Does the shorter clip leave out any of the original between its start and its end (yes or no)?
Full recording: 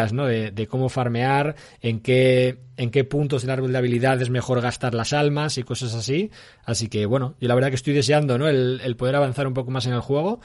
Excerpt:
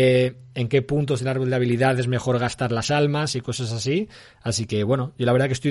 no